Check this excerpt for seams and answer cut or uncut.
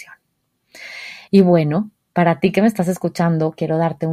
uncut